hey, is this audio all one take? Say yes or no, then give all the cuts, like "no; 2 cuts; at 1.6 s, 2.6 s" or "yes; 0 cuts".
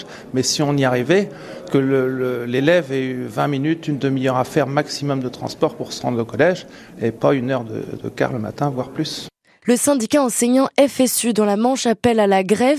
no; 1 cut; at 9.6 s